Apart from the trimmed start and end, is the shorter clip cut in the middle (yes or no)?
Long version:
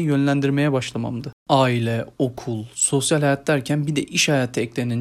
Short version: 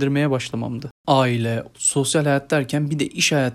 yes